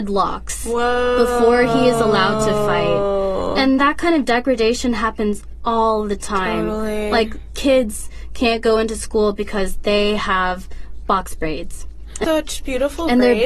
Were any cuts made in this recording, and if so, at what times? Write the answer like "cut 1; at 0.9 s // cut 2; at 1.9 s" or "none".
cut 1; at 12.2 s